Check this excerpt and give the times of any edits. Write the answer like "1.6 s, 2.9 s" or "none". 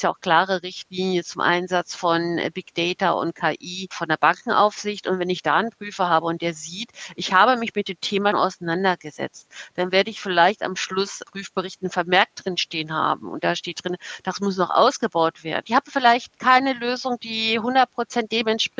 8.3 s, 15.6 s